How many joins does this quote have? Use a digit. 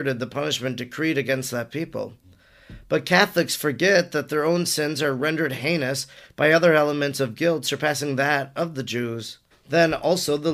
1